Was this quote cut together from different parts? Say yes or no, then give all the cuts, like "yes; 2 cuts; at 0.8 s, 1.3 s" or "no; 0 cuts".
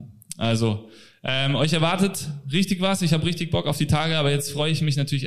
no; 0 cuts